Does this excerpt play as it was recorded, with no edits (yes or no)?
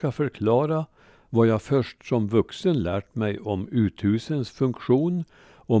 yes